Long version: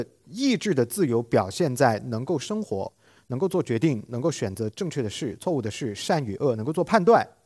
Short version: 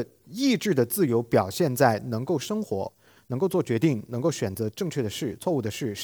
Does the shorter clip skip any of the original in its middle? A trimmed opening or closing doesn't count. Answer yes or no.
no